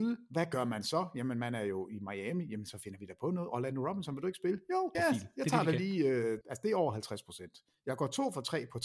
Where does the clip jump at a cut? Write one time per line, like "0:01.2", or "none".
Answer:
0:04.9
0:06.4

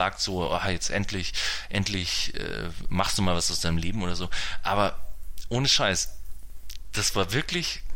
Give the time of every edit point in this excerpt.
none

